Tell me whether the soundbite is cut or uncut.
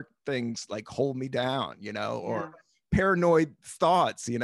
uncut